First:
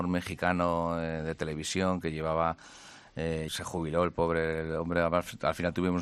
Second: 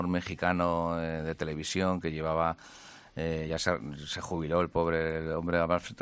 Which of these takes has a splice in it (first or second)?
first